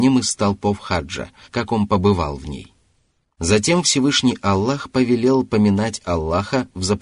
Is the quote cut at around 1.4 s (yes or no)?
yes